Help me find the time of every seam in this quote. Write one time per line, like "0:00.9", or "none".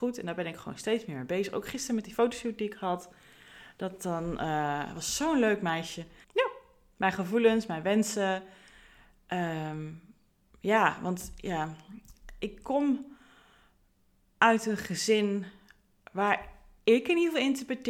0:06.2